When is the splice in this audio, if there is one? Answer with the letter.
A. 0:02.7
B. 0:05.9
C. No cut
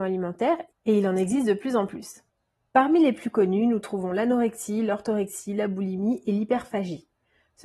C